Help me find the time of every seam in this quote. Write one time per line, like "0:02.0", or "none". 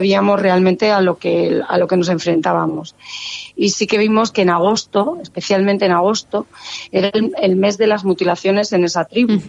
none